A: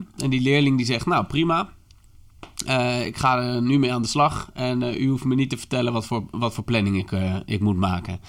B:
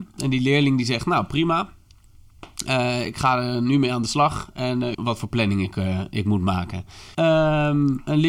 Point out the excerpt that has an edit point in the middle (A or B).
B